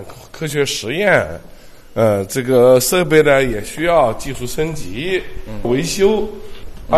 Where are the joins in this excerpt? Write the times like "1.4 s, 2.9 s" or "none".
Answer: none